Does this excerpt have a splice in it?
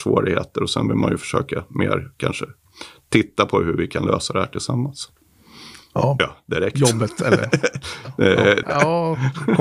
yes; 2 cuts; at 6.2 s, 8.6 s

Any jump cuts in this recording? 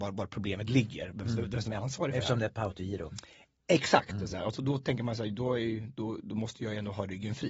no; 0 cuts

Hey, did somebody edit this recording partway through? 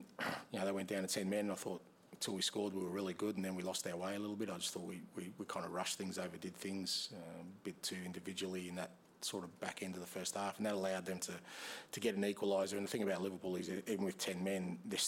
no; 0 cuts

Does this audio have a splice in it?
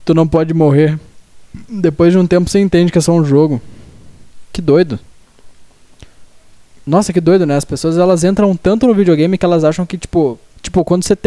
no; 0 cuts

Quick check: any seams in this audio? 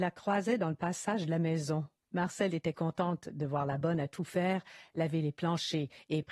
yes; 1 cut; at 2.0 s

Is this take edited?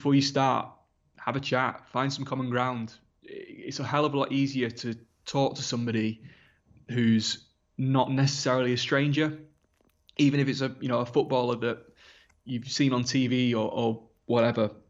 no; 0 cuts

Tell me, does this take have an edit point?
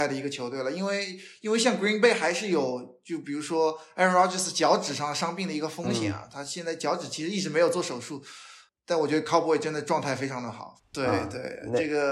yes; 1 cut; at 10.8 s

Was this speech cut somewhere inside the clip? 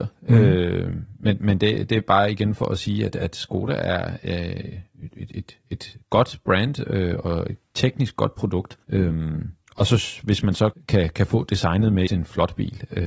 yes; 2 cuts; at 8.8 s, 12.1 s

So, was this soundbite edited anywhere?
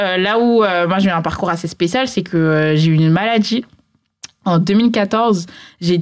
no; 0 cuts

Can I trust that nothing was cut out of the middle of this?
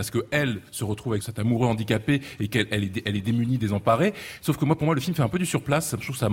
yes; 0 cuts

